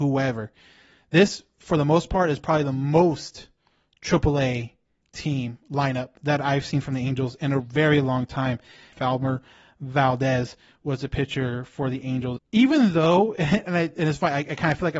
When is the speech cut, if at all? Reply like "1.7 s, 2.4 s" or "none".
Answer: 8.9 s, 12.4 s